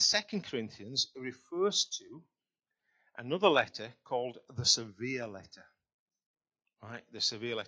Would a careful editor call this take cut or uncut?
uncut